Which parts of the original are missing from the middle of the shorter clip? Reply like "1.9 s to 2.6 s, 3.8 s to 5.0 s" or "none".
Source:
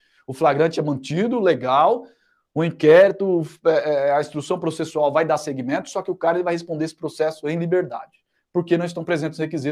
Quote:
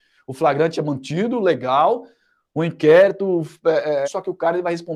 4.0 s to 5.9 s